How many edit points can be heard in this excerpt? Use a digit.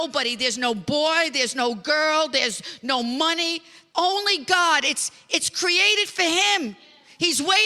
1